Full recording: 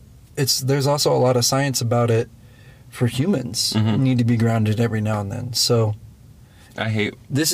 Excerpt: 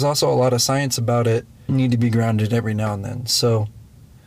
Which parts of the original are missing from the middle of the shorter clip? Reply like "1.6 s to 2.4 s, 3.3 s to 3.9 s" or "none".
2.5 s to 4.0 s